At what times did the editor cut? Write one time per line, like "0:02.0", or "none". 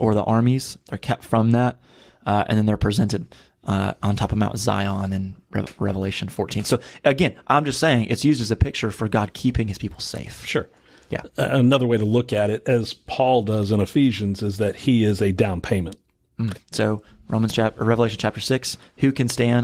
0:16.5